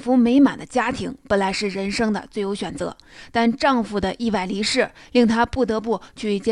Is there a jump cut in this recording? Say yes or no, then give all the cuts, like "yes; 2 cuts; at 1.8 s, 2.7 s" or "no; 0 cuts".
no; 0 cuts